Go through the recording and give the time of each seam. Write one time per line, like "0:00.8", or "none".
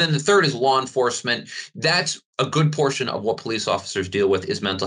0:02.3